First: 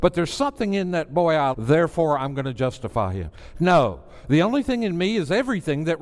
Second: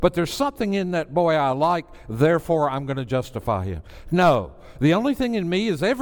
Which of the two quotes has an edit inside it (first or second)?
first